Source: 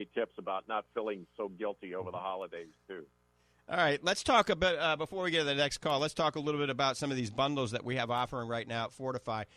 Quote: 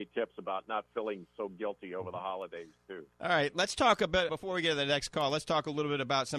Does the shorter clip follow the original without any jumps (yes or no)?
no